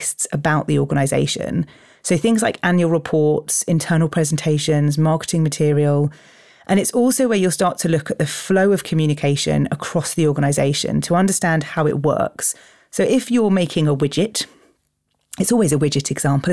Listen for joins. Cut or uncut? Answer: uncut